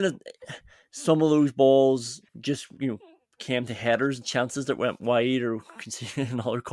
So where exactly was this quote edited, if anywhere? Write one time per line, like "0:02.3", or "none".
0:02.3

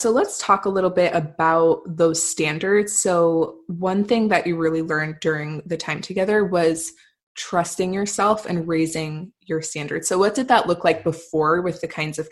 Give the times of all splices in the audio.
none

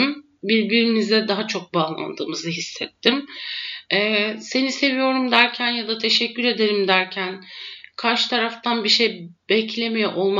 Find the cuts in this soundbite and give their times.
none

